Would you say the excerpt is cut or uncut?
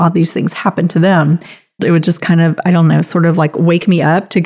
cut